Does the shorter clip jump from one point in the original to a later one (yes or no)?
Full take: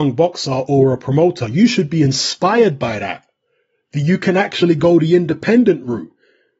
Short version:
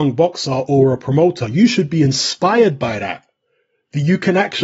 no